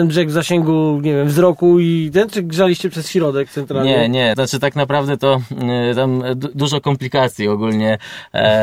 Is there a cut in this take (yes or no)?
yes